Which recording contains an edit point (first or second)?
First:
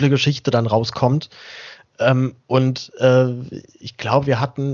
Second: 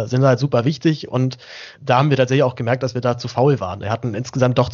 second